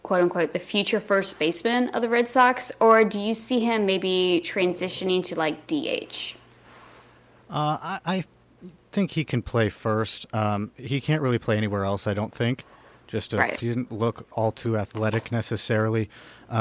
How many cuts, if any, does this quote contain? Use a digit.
1